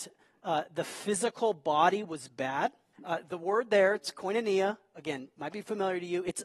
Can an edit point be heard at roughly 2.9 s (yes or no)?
yes